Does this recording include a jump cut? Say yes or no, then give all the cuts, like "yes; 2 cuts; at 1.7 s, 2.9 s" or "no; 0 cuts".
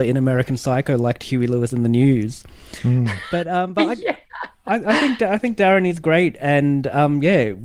no; 0 cuts